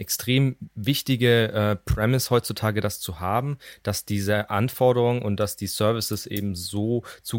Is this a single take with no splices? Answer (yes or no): yes